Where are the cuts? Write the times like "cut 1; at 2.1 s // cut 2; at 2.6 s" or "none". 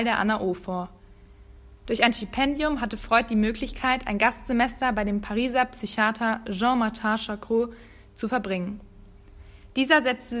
cut 1; at 1.8 s